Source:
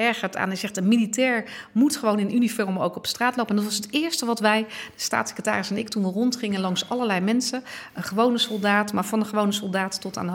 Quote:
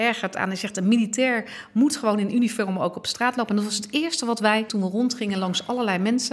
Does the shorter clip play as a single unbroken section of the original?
no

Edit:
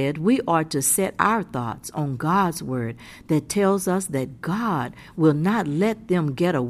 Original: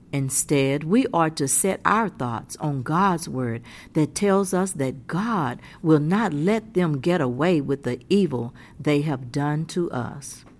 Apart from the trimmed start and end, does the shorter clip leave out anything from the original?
no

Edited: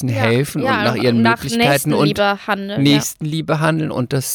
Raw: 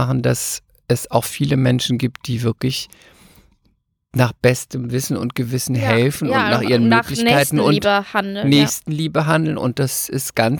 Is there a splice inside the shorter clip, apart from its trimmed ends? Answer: no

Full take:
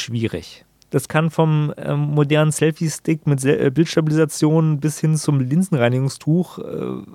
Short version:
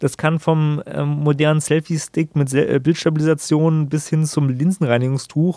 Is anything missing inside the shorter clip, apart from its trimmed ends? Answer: no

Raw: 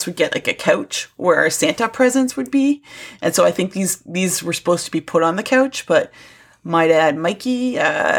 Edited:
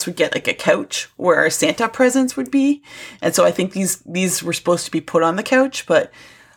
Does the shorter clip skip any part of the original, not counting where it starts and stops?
no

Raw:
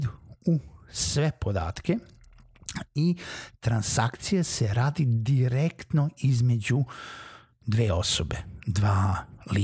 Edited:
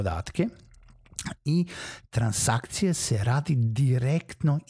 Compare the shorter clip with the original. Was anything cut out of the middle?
no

